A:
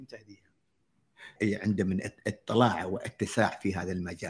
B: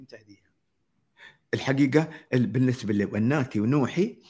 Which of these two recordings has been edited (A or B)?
A